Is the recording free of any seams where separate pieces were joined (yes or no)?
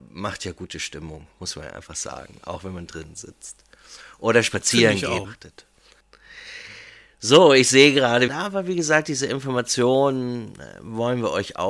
no